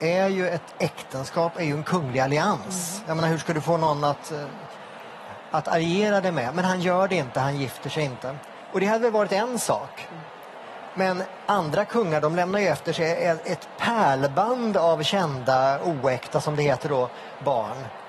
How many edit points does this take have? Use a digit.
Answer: 0